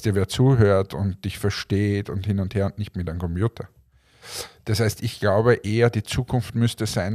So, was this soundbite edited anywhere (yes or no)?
no